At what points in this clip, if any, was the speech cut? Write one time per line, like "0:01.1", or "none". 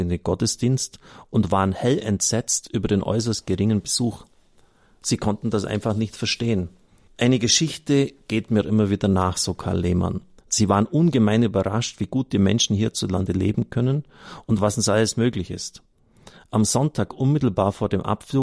0:07.1
0:10.4